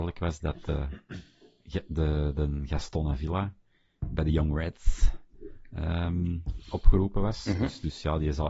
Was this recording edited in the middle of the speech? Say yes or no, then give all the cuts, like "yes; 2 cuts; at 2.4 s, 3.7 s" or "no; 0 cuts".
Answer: no; 0 cuts